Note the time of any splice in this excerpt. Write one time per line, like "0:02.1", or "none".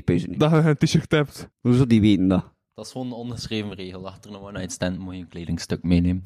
0:01.5